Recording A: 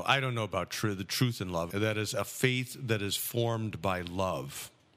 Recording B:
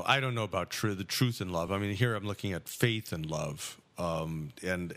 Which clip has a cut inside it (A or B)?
A